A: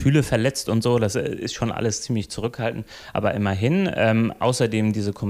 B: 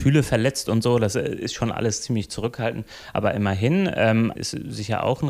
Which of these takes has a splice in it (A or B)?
B